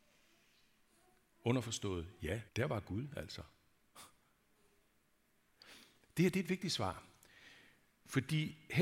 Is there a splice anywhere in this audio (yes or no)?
yes